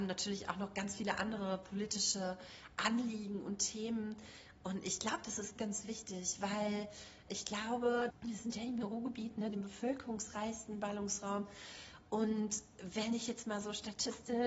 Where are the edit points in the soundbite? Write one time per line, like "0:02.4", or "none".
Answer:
0:05.6
0:08.1
0:09.5